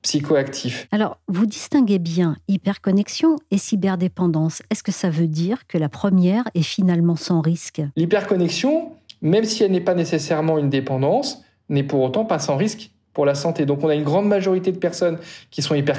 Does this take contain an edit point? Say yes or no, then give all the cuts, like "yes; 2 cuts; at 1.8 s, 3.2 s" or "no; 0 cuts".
no; 0 cuts